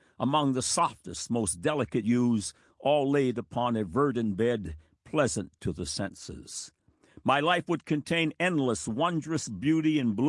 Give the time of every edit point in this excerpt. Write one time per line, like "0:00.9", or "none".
none